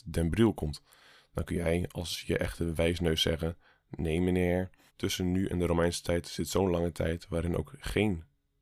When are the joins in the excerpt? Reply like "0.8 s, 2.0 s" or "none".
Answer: 4.9 s

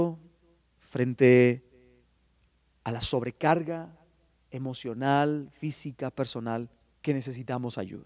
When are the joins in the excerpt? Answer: 6.9 s

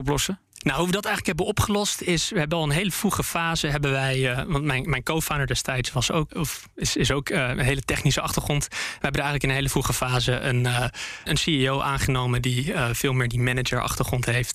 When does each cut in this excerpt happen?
6.3 s, 11.3 s

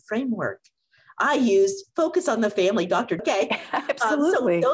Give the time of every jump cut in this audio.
3.2 s

